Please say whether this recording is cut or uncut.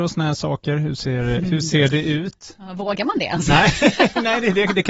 uncut